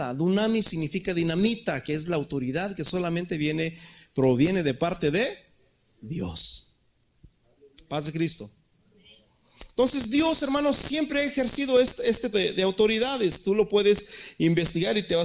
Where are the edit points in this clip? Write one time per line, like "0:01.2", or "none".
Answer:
0:12.3